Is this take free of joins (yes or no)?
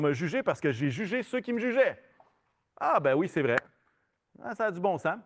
yes